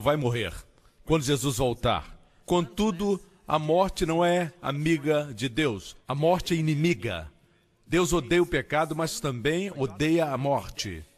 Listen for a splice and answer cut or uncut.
uncut